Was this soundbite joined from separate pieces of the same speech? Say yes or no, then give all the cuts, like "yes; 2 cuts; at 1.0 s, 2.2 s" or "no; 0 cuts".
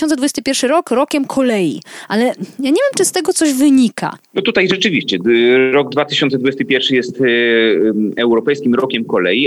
no; 0 cuts